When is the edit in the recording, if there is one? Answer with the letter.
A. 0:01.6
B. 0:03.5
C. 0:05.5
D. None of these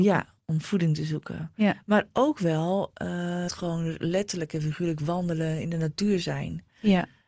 B